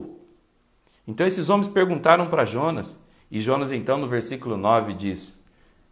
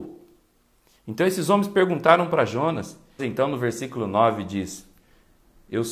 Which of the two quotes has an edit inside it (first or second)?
second